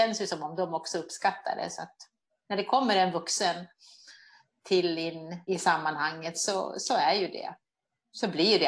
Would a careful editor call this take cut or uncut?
cut